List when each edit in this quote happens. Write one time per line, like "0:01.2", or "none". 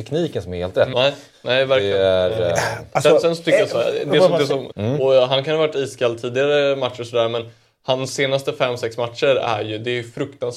0:00.9
0:04.7